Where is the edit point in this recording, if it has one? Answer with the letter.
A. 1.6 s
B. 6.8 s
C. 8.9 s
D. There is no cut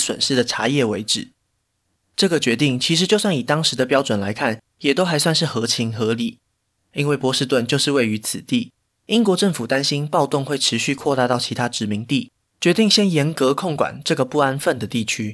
B